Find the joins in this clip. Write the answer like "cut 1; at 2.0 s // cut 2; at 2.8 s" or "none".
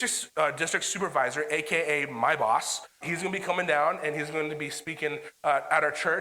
cut 1; at 3.0 s